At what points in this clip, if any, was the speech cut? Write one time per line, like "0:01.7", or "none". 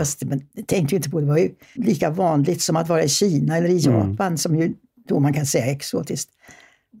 0:01.8